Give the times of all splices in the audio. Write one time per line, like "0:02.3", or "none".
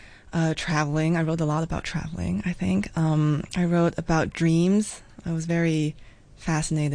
none